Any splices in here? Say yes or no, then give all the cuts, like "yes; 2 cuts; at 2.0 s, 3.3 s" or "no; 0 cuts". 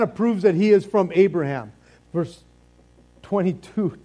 yes; 1 cut; at 2.0 s